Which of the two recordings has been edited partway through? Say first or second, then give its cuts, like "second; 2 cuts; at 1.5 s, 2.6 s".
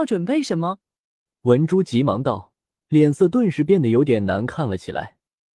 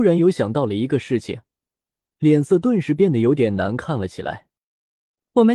first; 1 cut; at 2.7 s